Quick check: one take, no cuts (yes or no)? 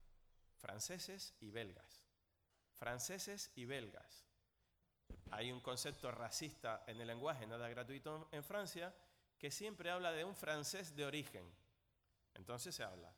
yes